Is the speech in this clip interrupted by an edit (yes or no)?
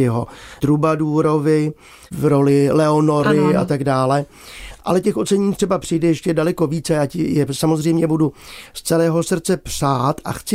no